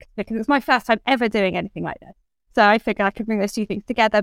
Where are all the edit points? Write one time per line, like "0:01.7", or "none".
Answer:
0:02.5